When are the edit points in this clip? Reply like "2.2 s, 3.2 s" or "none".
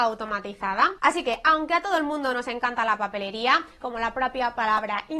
1.0 s, 3.8 s